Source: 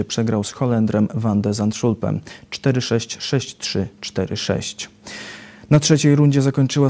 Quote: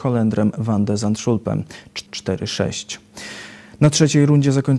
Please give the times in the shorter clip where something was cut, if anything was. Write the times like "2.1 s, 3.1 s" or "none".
2.1 s